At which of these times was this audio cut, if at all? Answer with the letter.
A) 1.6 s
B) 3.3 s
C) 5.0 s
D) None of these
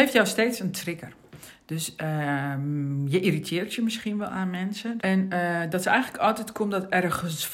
C